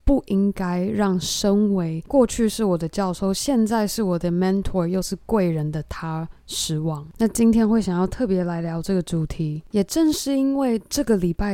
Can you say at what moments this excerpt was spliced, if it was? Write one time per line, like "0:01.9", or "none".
0:07.1